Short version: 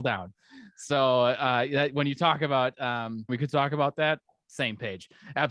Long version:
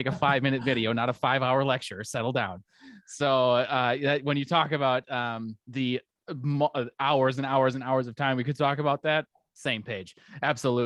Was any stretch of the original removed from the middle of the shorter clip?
yes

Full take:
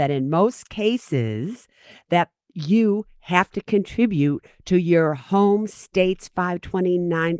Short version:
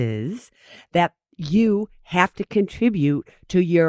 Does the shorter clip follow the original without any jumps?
yes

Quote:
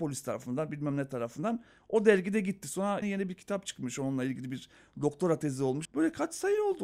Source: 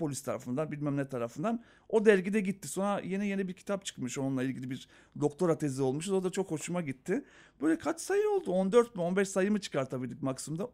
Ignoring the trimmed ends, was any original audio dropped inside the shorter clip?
yes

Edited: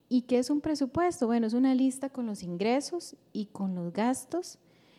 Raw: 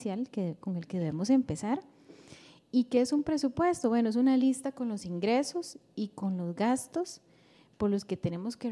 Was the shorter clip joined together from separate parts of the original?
no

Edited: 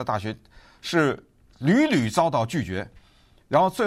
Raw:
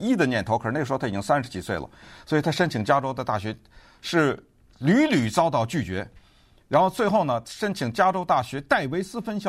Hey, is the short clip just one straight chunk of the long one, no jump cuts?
yes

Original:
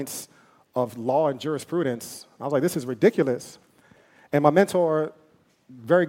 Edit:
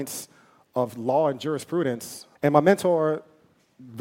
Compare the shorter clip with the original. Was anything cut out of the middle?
yes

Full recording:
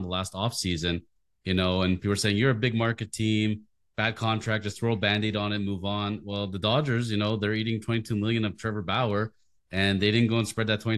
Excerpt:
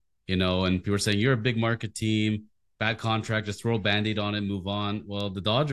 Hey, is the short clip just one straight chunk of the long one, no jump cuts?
yes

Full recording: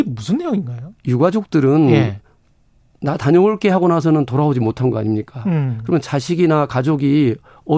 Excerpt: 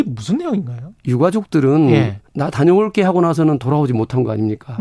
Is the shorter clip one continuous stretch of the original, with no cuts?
no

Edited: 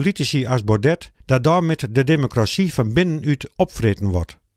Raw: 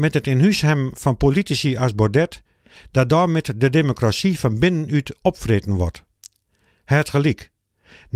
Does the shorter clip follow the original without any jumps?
no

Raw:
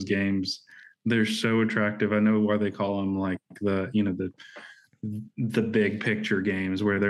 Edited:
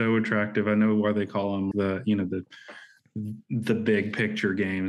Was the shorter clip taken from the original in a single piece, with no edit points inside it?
no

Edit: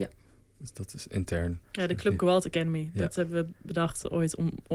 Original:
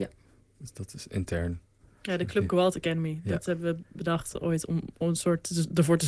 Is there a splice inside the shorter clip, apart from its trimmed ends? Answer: yes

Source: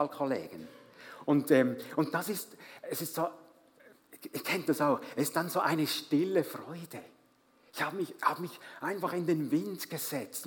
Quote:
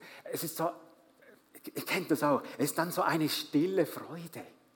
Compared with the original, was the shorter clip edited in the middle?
no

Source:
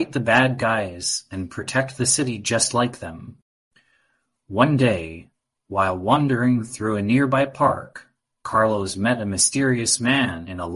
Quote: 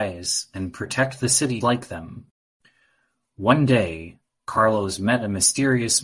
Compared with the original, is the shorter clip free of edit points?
no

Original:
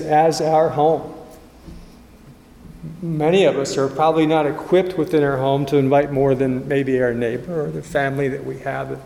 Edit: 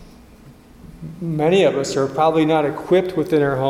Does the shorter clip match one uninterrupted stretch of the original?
yes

